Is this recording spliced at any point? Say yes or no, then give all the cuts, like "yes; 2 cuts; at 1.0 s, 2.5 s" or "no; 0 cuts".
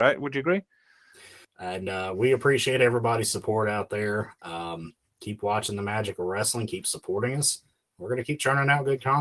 yes; 1 cut; at 1.4 s